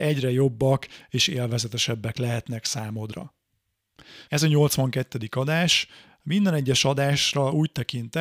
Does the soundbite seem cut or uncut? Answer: cut